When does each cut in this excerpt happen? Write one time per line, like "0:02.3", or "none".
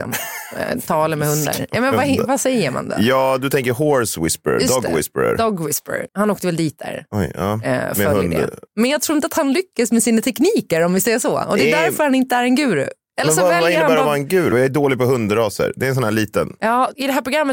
0:06.1
0:08.7
0:14.5